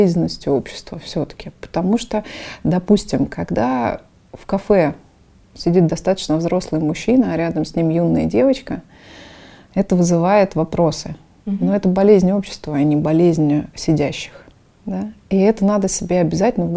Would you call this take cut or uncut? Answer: uncut